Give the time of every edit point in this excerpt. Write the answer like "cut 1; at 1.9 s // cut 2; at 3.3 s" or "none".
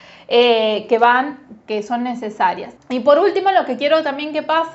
cut 1; at 2.8 s